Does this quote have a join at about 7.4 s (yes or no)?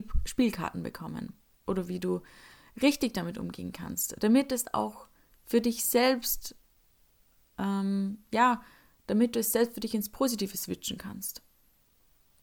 no